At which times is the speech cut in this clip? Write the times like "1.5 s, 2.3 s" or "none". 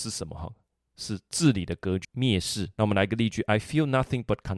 2.0 s